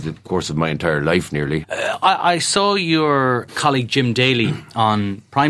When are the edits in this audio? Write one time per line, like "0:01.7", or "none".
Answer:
0:01.6
0:03.5